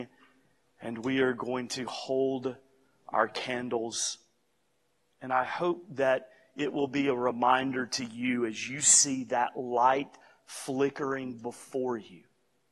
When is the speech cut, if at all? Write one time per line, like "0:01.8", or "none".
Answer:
none